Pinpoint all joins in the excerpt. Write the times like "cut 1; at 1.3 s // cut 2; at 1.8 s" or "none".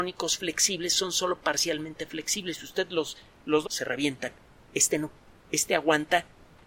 cut 1; at 3.6 s